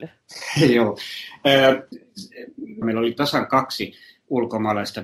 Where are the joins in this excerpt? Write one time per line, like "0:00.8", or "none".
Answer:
0:02.8

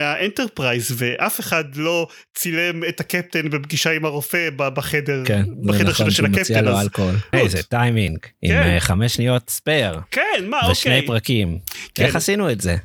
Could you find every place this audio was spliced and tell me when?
0:07.3

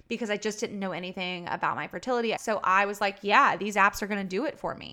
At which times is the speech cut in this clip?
0:02.4

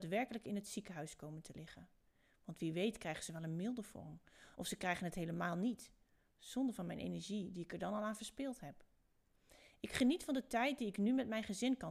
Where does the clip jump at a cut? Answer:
none

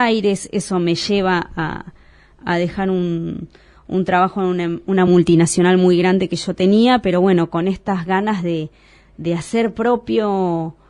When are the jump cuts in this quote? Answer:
none

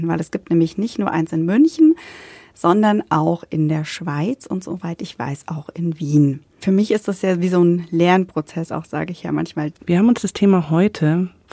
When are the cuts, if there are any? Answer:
0:06.6
0:09.8

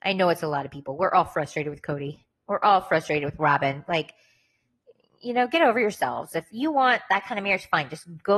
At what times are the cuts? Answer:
none

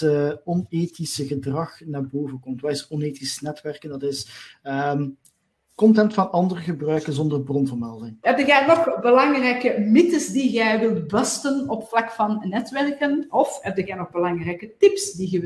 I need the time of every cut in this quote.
0:08.2

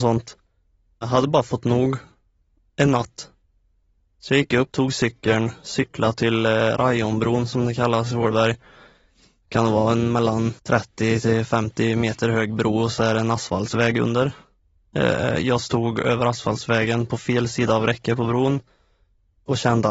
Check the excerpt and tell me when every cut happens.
0:04.7
0:10.6

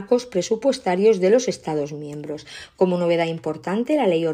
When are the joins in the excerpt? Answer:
none

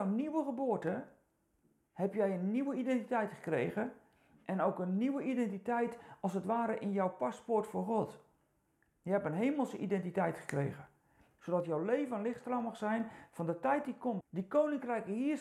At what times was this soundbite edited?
0:11.4
0:14.2

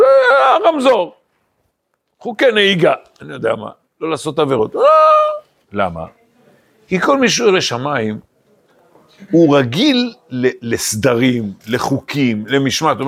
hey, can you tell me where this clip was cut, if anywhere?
0:05.6

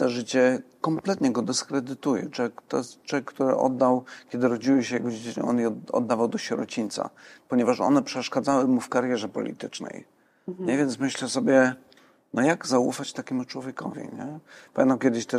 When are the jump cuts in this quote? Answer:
none

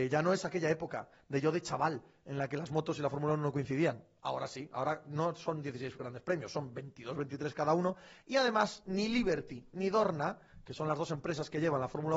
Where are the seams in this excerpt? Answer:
none

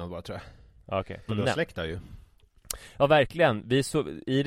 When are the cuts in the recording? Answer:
0:01.3

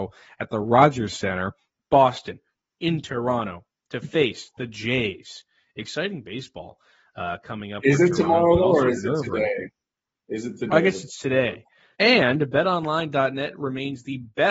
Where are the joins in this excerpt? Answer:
0:11.9

